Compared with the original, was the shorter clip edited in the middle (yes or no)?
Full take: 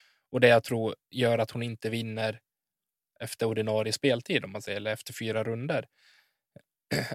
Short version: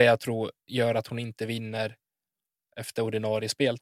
no